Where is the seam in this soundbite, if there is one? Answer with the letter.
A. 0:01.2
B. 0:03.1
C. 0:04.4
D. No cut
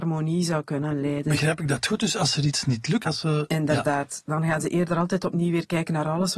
B